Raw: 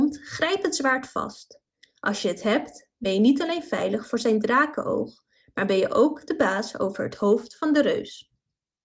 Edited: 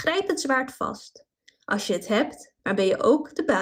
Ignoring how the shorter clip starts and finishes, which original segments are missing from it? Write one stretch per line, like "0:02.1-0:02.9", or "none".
0:02.9-0:05.5